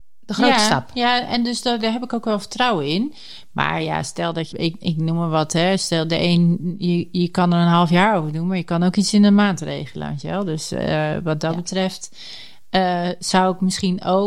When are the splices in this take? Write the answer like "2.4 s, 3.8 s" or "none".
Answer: 4.5 s